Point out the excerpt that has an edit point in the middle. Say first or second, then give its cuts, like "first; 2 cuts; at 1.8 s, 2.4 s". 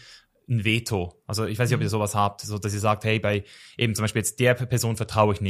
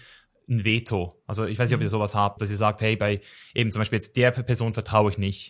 second; 1 cut; at 2.4 s